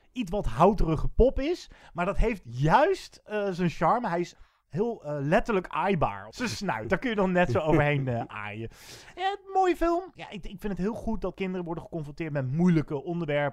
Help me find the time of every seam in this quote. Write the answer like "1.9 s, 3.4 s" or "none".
6.3 s, 10.1 s